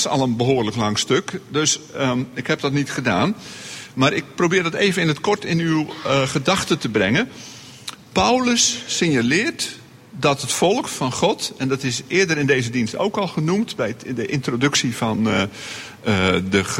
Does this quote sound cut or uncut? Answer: uncut